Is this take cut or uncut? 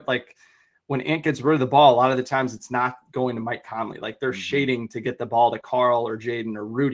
uncut